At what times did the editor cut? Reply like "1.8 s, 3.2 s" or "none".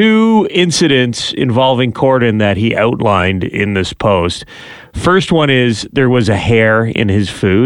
none